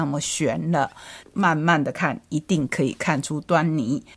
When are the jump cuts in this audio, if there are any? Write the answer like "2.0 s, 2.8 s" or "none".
1.2 s